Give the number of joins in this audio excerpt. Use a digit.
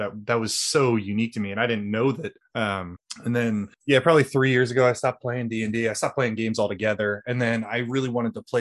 0